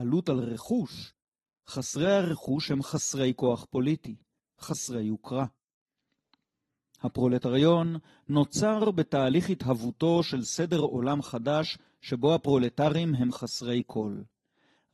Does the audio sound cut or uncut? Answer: cut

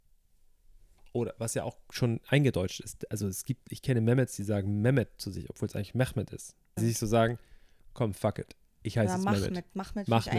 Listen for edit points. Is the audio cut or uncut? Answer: cut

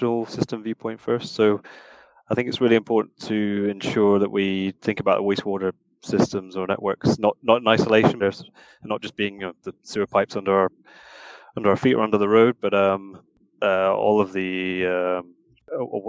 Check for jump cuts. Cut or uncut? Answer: cut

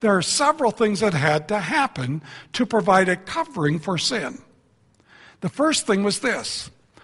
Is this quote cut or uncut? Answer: uncut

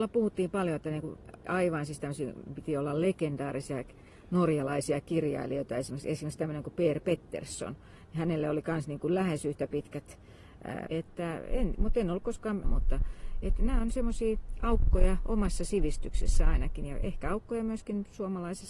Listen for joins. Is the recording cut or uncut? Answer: cut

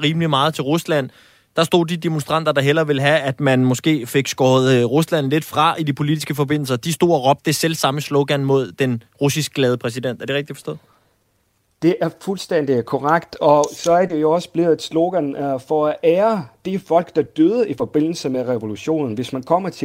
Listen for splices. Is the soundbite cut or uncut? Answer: uncut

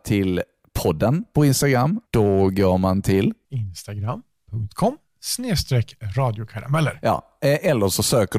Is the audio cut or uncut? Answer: cut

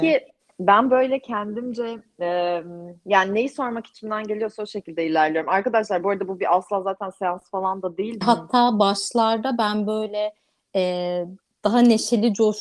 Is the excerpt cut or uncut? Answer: cut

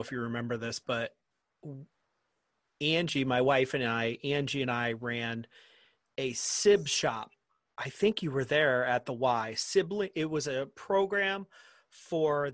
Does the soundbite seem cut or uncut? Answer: uncut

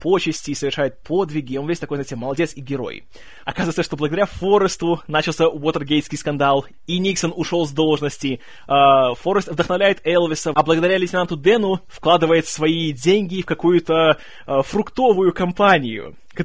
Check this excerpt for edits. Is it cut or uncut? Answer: cut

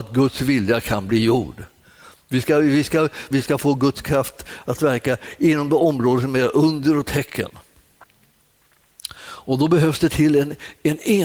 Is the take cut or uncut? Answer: cut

